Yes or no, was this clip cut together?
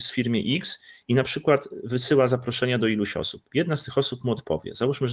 no